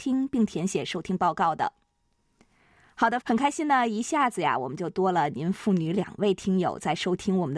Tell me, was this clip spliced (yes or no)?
yes